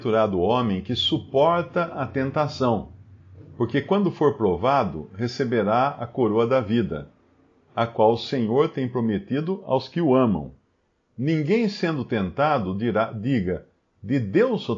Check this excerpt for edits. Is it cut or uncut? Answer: uncut